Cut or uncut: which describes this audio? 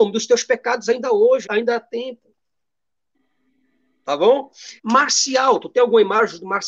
cut